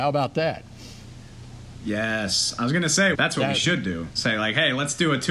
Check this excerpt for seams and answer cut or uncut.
cut